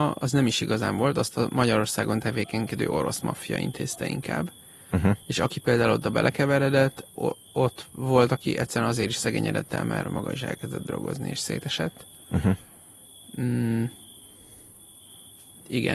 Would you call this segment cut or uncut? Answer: cut